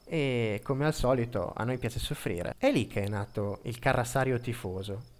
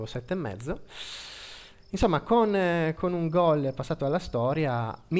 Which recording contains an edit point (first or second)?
first